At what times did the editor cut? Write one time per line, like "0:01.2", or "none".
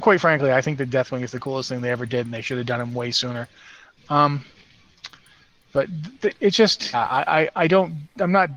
0:04.0
0:06.9

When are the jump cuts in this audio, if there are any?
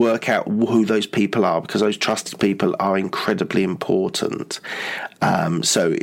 none

